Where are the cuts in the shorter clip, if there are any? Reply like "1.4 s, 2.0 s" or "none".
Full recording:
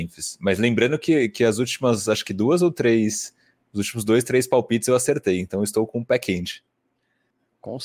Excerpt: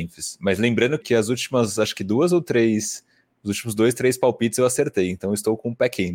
1.0 s